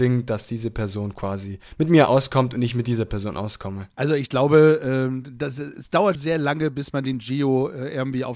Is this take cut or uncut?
cut